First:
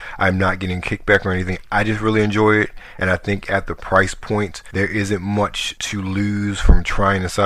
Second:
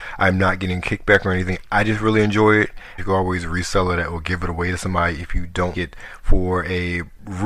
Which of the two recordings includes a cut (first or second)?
second